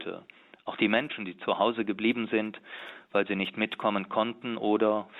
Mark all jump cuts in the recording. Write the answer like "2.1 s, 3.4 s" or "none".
none